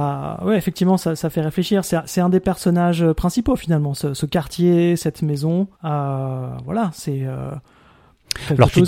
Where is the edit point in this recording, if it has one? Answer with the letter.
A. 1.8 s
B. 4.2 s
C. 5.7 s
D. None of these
C